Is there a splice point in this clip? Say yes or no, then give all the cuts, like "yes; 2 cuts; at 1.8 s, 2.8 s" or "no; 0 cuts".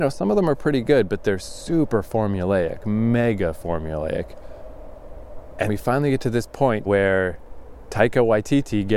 yes; 3 cuts; at 2.8 s, 5.7 s, 6.9 s